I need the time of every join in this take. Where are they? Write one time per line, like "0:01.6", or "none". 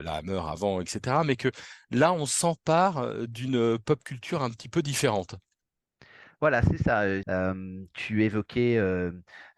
0:07.2

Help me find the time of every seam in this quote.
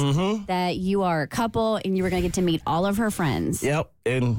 none

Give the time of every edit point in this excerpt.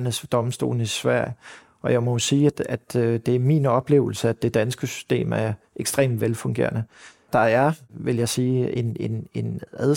none

